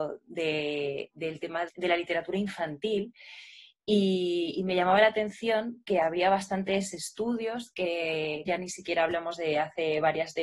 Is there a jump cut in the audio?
yes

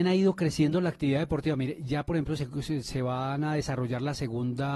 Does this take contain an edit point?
no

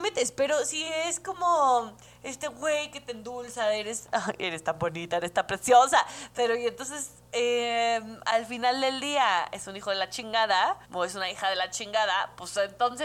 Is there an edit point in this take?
yes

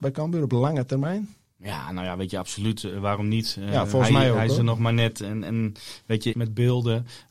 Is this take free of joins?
no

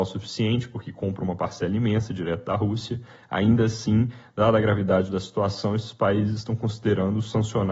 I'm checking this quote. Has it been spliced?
no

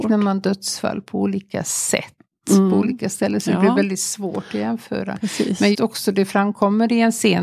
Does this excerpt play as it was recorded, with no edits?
no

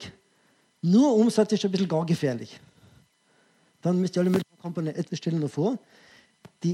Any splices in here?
yes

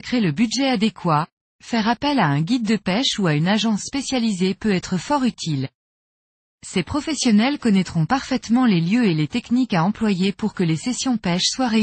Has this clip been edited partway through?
no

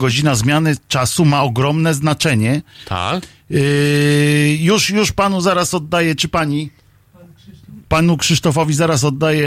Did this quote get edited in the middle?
no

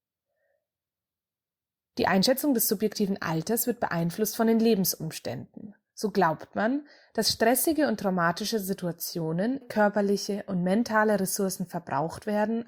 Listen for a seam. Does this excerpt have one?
yes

